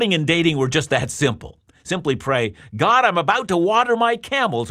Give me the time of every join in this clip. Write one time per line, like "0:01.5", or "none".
none